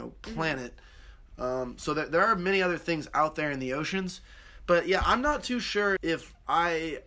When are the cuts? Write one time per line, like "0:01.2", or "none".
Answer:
0:06.0